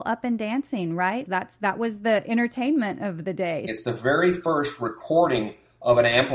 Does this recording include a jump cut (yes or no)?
yes